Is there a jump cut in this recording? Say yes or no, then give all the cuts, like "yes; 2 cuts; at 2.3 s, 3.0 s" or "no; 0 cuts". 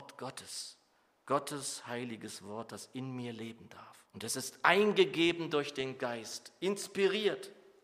yes; 1 cut; at 4.0 s